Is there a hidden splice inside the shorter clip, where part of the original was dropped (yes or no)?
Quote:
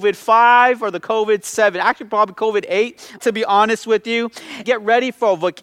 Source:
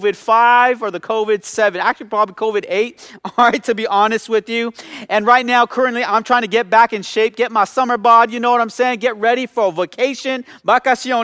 yes